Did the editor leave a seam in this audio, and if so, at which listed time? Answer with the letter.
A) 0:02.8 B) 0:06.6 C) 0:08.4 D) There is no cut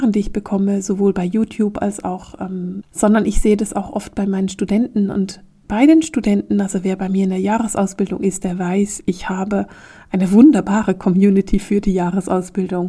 A